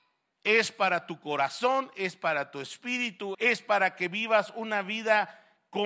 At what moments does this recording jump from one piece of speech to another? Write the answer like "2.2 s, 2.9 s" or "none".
3.3 s